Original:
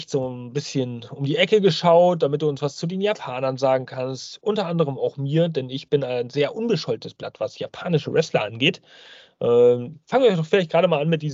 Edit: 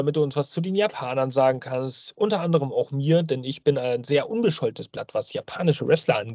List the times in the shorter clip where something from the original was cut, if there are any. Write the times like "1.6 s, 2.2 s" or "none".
none